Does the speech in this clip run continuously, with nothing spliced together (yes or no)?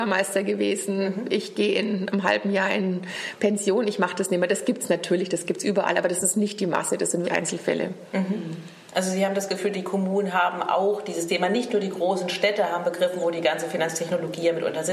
no